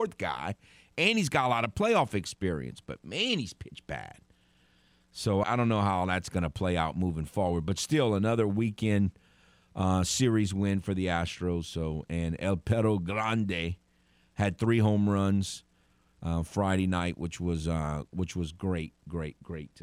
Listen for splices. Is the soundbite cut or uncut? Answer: cut